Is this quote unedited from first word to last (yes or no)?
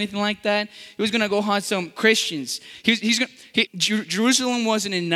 no